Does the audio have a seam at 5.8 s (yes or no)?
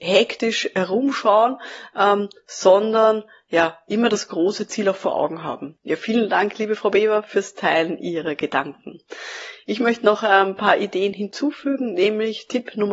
yes